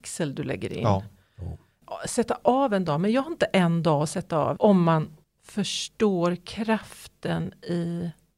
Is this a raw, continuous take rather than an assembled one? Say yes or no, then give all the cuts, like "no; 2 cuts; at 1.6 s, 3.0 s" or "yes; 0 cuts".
no; 1 cut; at 4.6 s